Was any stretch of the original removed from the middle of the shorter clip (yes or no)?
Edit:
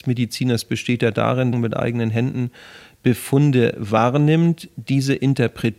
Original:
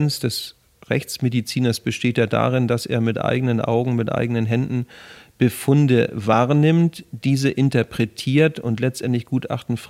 yes